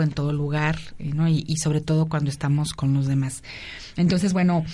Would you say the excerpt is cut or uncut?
uncut